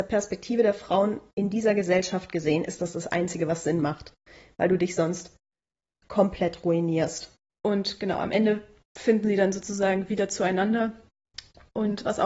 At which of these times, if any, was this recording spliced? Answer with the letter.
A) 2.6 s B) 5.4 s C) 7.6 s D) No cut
C